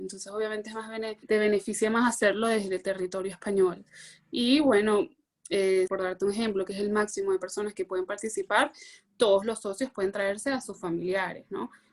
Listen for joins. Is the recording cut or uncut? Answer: cut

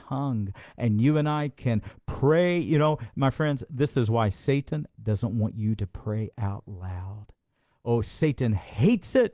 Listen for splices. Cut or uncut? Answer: uncut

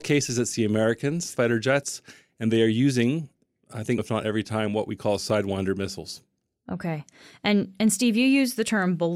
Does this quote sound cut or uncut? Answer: cut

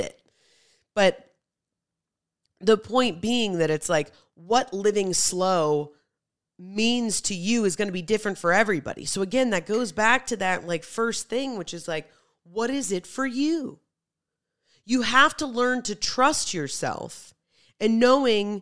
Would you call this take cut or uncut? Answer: uncut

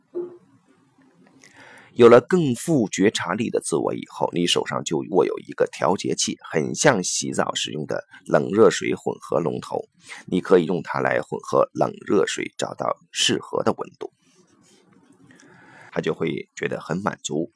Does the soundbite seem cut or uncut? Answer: cut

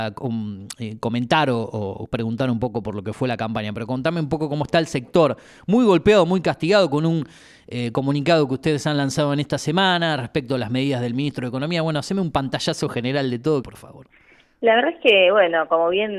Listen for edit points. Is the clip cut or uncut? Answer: cut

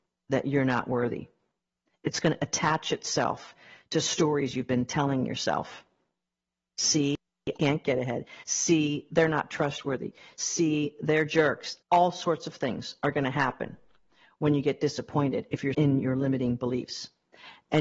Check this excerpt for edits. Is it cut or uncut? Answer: cut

